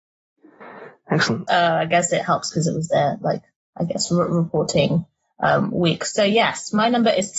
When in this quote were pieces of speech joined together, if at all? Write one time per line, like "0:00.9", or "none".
0:01.5